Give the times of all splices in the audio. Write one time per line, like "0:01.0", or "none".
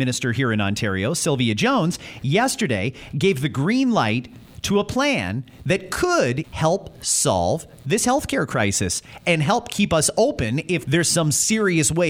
0:06.4
0:10.8